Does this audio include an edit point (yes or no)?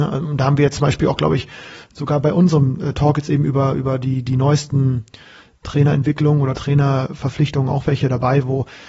no